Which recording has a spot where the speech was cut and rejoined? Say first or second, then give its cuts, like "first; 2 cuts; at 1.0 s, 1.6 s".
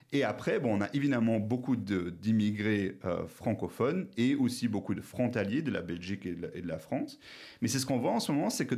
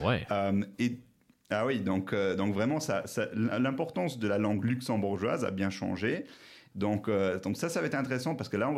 second; 1 cut; at 6.7 s